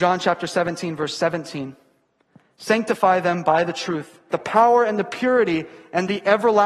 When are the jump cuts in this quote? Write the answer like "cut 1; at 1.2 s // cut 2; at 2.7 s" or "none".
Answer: cut 1; at 4.3 s